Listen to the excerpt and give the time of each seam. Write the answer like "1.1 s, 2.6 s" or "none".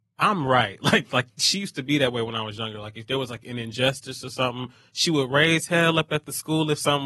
none